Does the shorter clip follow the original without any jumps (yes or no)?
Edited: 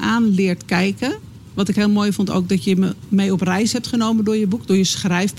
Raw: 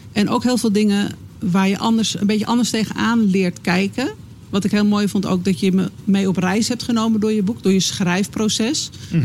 yes